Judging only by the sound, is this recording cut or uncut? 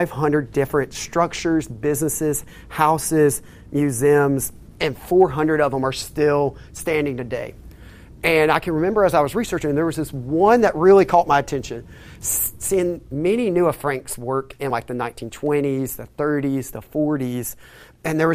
uncut